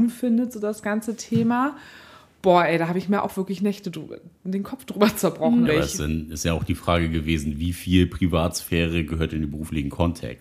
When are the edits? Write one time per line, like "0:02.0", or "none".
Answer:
0:05.7